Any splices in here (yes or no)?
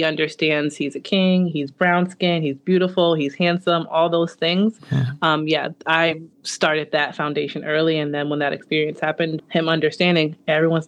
yes